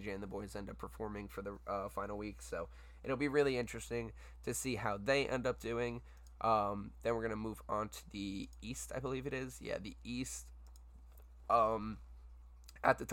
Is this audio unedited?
yes; 0 cuts

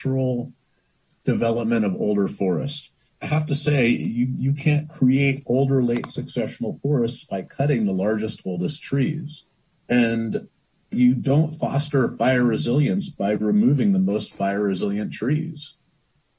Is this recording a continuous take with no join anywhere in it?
yes; 0 cuts

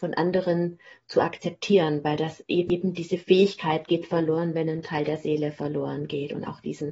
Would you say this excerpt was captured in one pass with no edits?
yes; 0 cuts

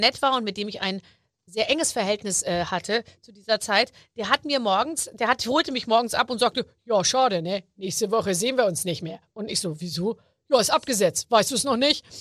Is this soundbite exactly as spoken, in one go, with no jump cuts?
yes; 0 cuts

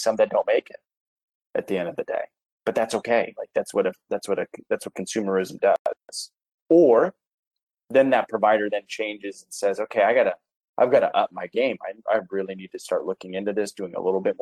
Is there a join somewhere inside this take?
no; 0 cuts

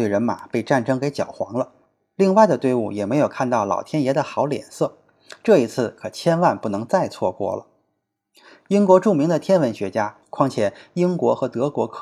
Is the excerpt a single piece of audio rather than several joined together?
no; 1 cut; at 10.2 s

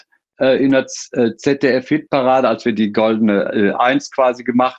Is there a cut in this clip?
no; 0 cuts

